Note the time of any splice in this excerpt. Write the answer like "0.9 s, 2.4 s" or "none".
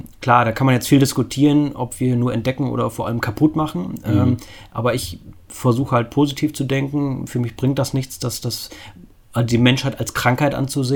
none